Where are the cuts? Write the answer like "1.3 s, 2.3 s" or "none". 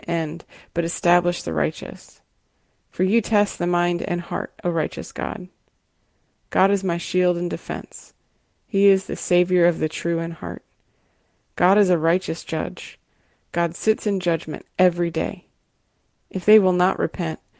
none